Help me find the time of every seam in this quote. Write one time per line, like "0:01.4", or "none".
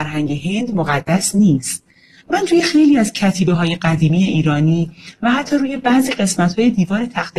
0:02.2